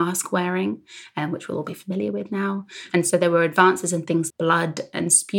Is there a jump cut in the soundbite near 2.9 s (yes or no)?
yes